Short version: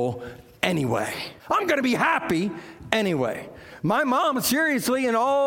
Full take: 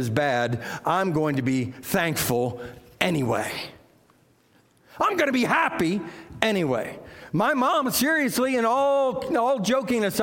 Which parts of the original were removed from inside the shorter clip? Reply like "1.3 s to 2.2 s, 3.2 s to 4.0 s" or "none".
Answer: 3.8 s to 4.9 s